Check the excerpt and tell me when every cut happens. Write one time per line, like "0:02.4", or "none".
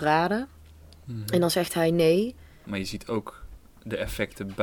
0:02.6